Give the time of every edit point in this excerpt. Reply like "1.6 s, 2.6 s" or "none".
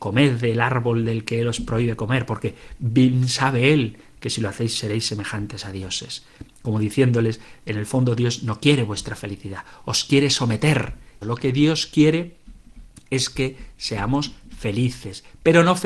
11.2 s